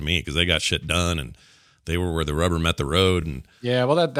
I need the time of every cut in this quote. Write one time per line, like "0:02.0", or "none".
none